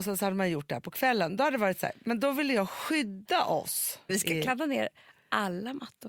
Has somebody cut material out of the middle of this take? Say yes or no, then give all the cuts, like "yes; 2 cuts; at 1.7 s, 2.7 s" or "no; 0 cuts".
yes; 1 cut; at 4.1 s